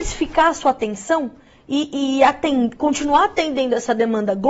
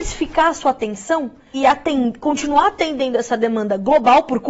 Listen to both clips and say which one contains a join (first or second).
second